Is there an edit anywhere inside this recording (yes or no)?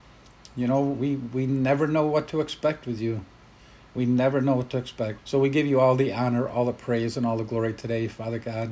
yes